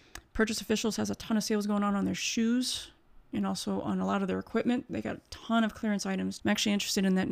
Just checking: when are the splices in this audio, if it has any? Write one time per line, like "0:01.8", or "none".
0:06.4

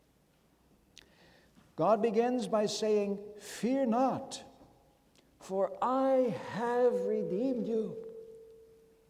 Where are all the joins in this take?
none

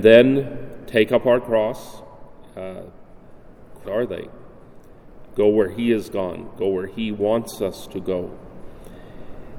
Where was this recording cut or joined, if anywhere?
0:03.8
0:05.3

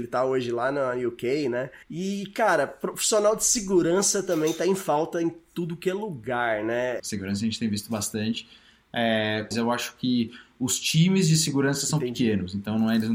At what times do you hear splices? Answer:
0:01.8
0:07.0
0:09.5

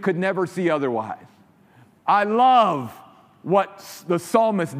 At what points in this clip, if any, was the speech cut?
none

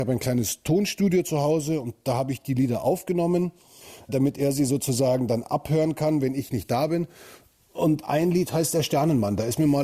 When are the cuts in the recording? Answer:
none

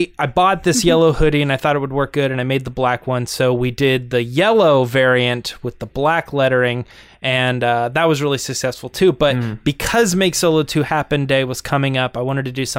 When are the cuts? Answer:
none

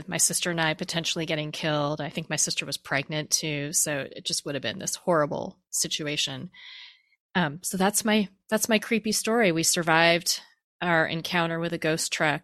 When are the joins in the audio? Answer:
none

